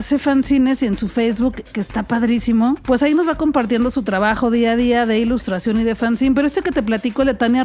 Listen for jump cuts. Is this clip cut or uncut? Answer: uncut